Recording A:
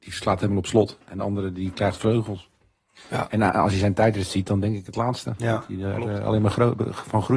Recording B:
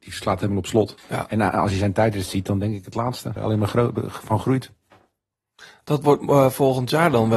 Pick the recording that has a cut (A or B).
B